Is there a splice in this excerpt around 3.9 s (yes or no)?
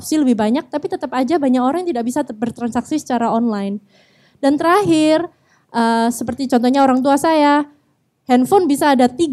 no